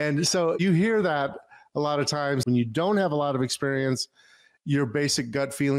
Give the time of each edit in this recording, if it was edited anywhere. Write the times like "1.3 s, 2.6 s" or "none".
2.4 s

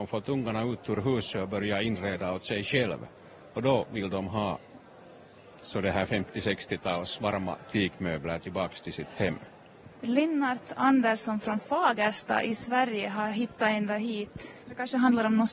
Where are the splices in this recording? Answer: 5.5 s, 10.0 s, 14.6 s

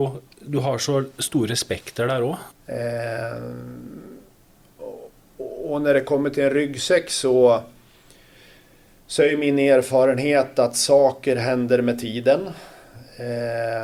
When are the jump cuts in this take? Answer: 2.5 s

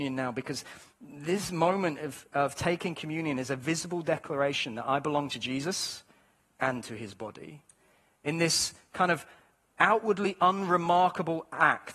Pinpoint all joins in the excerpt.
none

